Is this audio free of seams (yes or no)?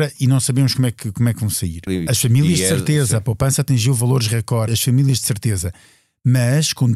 no